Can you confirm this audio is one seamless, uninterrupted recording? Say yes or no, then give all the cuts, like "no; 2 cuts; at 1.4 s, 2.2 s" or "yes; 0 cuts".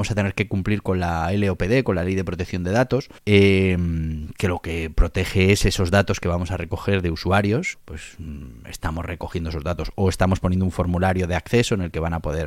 no; 2 cuts; at 3.2 s, 7.7 s